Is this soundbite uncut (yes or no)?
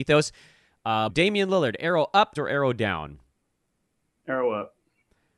no